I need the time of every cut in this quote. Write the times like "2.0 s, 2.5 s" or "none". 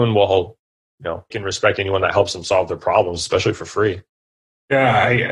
1.3 s